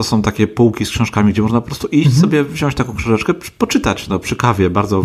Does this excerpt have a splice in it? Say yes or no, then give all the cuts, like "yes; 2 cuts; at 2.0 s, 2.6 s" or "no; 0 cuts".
no; 0 cuts